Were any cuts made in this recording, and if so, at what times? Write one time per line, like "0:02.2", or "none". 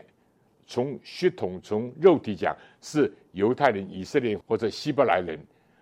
0:04.4

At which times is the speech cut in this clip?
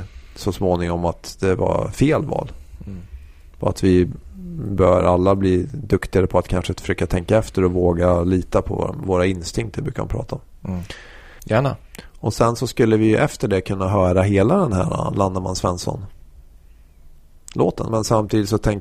0:11.4
0:17.9

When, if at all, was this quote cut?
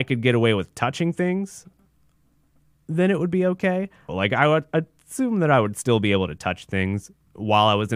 0:04.1

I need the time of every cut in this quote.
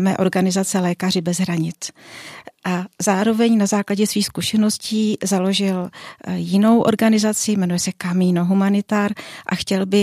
none

